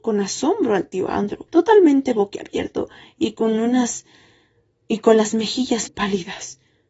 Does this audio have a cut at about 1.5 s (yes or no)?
yes